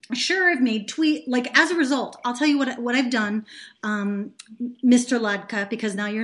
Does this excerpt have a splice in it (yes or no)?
no